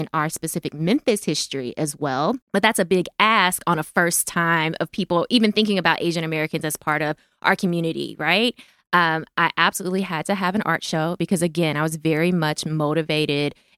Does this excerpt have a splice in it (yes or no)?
yes